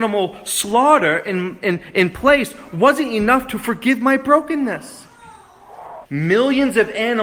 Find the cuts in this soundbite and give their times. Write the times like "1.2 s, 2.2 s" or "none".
6.1 s